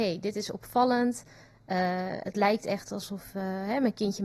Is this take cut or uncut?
uncut